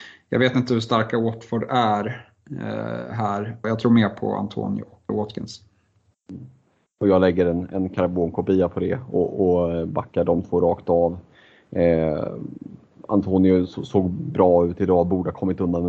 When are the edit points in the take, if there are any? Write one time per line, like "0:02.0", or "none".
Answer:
0:03.6
0:05.1